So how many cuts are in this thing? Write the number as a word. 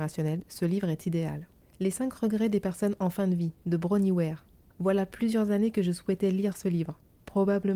zero